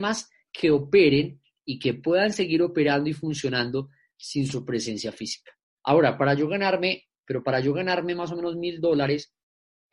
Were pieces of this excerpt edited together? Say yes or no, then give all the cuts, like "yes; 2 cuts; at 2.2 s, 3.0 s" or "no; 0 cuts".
yes; 2 cuts; at 5.7 s, 7.1 s